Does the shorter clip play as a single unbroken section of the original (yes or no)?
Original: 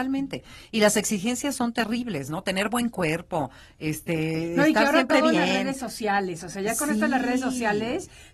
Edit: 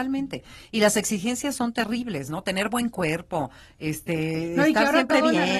yes